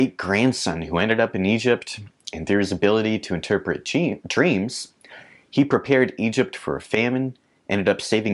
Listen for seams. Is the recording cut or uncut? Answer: uncut